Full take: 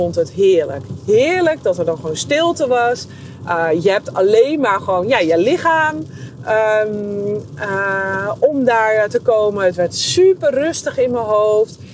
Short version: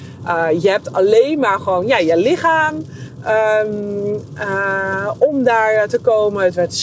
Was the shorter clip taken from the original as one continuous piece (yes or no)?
yes